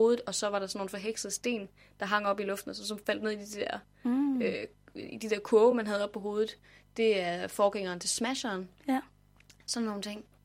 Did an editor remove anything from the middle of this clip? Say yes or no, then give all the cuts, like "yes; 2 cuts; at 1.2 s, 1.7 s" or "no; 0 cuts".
no; 0 cuts